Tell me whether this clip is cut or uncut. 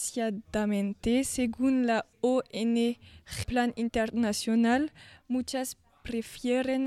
cut